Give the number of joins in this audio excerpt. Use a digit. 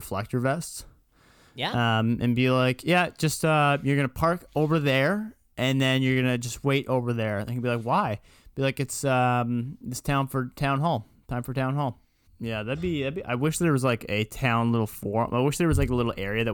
1